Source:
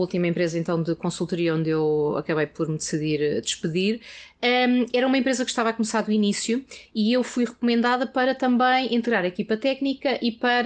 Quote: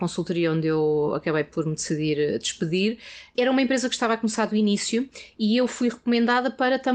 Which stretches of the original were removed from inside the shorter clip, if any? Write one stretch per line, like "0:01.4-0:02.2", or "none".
0:04.4-0:04.9